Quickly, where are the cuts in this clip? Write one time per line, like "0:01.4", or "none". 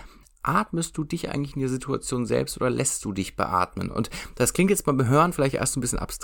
none

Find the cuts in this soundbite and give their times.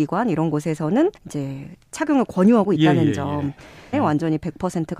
0:01.2
0:03.9

